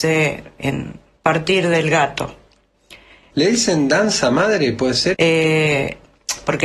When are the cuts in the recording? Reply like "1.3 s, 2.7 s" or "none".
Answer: 3.3 s, 5.1 s